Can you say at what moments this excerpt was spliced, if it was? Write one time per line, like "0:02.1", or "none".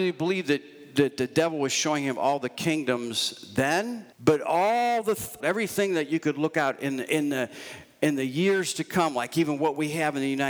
0:04.1
0:05.4